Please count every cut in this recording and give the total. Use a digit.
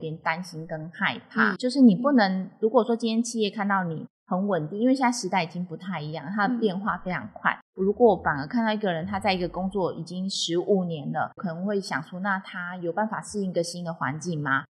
2